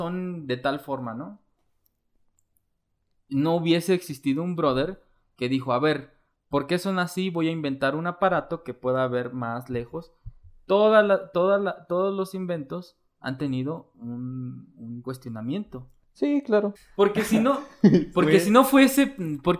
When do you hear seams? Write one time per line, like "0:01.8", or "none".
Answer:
0:16.8